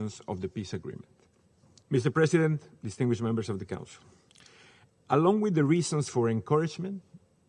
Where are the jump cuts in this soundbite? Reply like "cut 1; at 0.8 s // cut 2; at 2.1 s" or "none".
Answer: cut 1; at 1.8 s